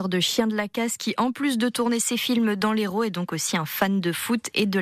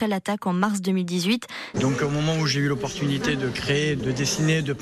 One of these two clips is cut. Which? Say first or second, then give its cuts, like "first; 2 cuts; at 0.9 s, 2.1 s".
second; 1 cut; at 1.7 s